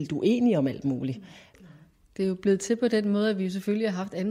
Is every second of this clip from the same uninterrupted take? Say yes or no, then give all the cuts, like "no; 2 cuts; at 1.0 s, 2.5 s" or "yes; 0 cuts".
no; 1 cut; at 1.5 s